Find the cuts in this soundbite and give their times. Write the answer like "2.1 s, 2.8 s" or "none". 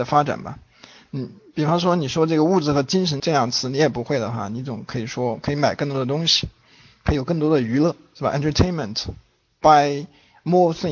3.2 s